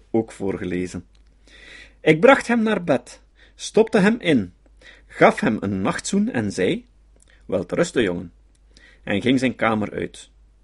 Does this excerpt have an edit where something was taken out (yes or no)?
no